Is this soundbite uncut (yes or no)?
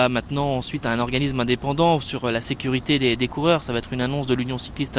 yes